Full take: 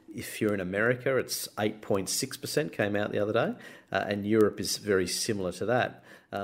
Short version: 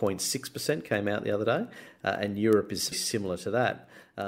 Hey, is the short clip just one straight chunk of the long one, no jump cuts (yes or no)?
no